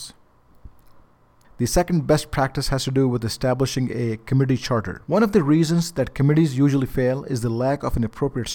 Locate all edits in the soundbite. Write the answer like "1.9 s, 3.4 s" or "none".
5.1 s